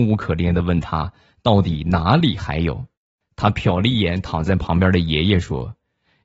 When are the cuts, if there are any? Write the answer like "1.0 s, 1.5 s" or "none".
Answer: none